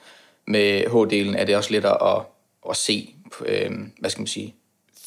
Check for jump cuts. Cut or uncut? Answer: cut